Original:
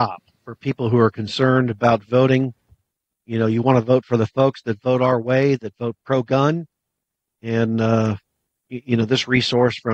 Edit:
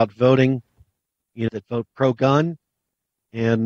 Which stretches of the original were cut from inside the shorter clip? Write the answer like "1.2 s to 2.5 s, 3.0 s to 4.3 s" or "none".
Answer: 3.4 s to 5.6 s